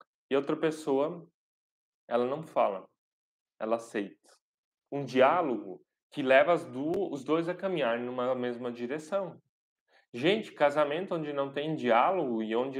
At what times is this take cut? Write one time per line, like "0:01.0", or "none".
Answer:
0:04.9